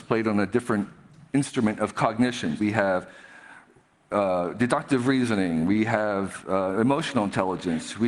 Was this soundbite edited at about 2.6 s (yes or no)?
yes